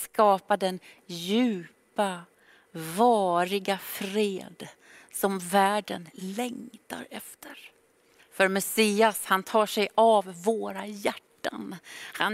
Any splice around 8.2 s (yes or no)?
yes